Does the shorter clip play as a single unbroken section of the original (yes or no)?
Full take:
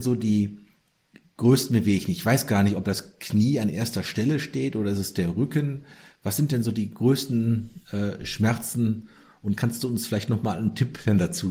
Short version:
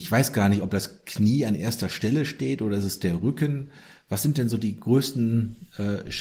yes